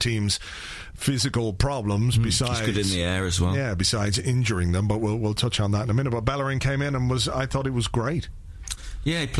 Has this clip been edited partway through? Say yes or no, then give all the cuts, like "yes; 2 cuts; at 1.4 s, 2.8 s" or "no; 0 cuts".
no; 0 cuts